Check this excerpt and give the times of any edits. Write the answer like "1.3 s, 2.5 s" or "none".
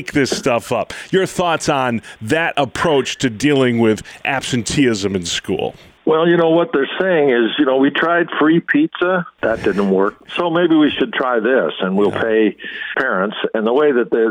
10.3 s